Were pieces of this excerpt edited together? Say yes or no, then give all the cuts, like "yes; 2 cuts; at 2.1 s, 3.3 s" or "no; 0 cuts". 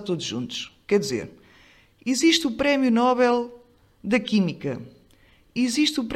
no; 0 cuts